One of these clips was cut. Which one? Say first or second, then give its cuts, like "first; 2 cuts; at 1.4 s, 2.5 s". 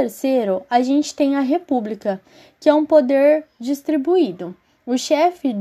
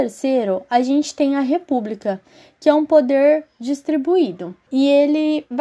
second; 1 cut; at 4.7 s